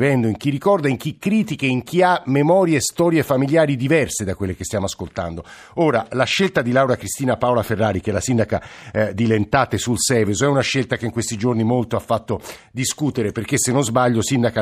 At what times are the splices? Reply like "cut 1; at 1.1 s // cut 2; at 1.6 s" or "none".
none